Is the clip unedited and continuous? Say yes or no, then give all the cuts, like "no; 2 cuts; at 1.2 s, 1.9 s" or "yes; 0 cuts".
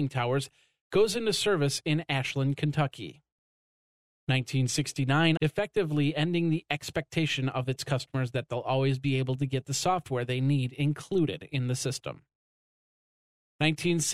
no; 1 cut; at 5.4 s